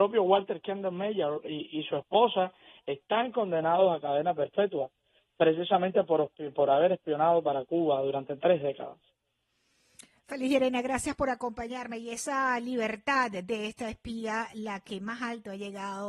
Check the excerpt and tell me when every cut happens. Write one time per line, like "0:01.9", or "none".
none

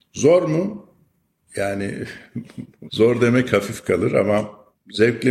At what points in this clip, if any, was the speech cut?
0:02.9

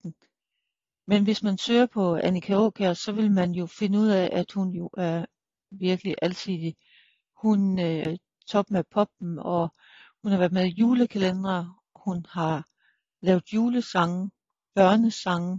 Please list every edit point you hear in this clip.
0:05.8
0:08.0

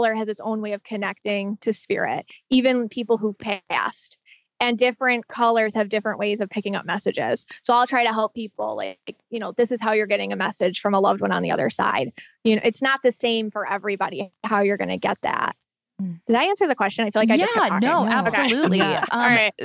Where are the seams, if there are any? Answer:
none

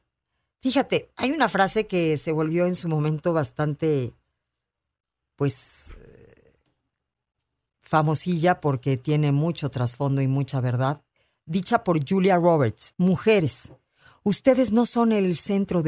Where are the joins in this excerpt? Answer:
0:12.9

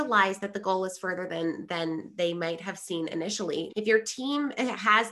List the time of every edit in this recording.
0:03.7

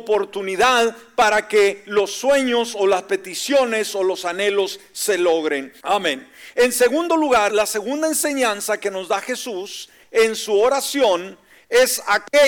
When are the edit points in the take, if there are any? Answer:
0:05.8
0:07.5

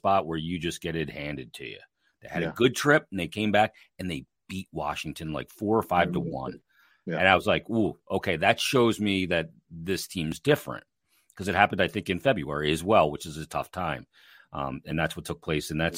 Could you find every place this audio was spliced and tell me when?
none

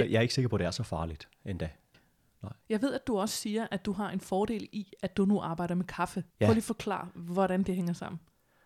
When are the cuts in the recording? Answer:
0:01.9
0:06.3

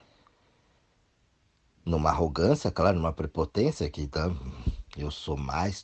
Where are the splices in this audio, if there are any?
none

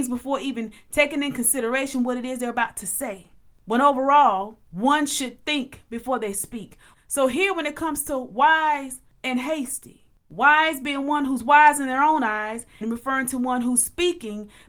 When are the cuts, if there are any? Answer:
0:04.7
0:06.9
0:12.8

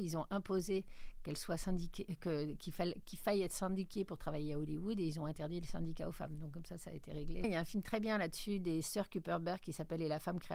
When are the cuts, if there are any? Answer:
0:07.4

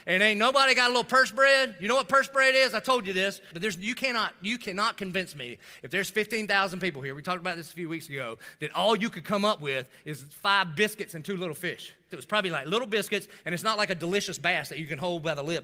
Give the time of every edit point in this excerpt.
0:03.5
0:12.1

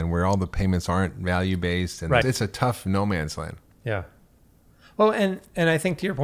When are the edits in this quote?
0:02.2

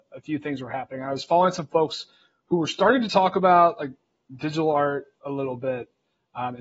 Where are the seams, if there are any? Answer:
0:05.2

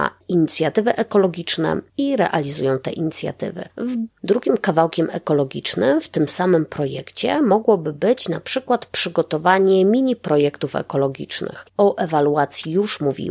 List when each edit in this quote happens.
0:04.1
0:11.7

